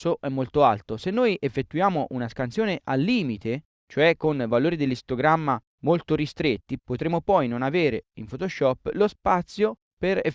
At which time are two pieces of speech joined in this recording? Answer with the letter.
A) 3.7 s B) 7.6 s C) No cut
C